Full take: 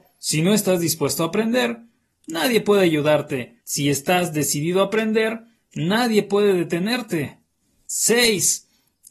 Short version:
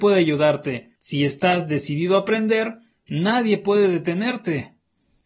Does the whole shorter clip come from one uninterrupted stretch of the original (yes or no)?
yes